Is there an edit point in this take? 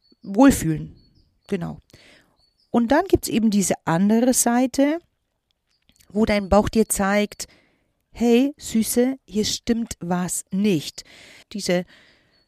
yes; 1 cut; at 11.4 s

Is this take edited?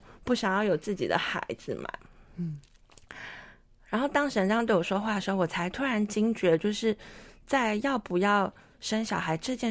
no; 0 cuts

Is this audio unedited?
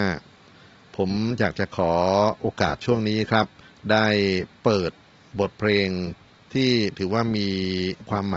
yes; 0 cuts

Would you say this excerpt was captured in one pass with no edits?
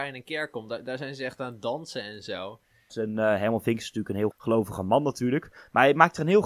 no; 2 cuts; at 2.9 s, 4.3 s

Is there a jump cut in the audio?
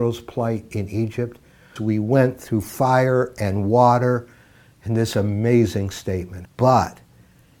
yes; 2 cuts; at 1.8 s, 6.4 s

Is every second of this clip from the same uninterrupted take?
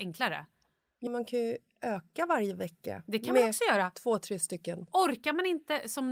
no; 1 cut; at 1.1 s

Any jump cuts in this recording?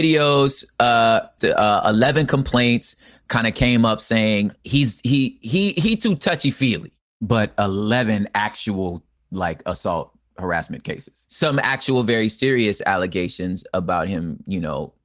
yes; 1 cut; at 1.4 s

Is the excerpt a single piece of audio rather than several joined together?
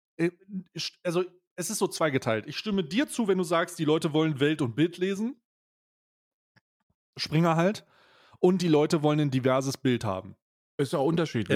yes; 0 cuts

